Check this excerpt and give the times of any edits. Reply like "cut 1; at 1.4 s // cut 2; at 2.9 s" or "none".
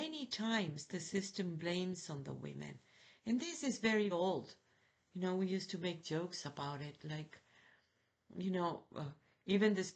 cut 1; at 4.1 s